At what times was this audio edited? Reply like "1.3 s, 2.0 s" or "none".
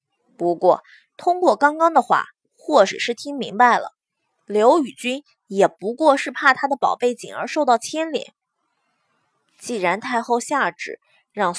none